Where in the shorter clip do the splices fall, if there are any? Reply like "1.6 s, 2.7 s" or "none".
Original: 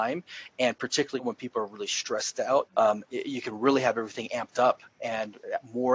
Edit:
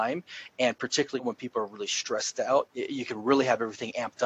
2.7 s